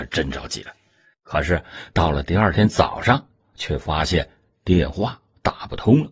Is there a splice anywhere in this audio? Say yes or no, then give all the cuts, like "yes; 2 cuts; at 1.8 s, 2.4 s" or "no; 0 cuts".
yes; 2 cuts; at 1.1 s, 3.5 s